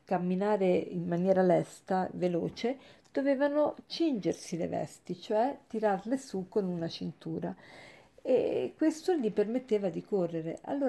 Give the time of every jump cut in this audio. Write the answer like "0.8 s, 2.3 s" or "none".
none